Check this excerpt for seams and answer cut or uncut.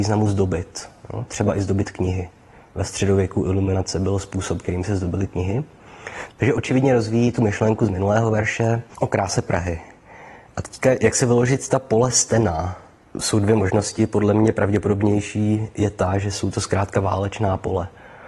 cut